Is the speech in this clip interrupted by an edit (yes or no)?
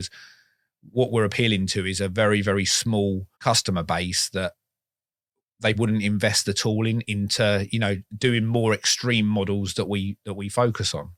yes